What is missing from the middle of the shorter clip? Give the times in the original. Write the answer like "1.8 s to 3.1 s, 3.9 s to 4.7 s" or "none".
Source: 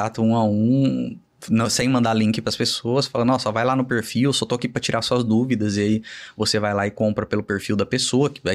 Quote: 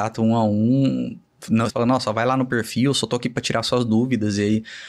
1.7 s to 3.1 s